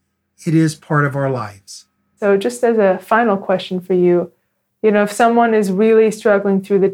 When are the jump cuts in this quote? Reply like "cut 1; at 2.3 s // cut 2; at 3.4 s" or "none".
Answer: none